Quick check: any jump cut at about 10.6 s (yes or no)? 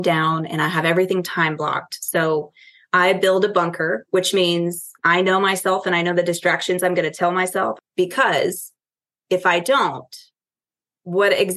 no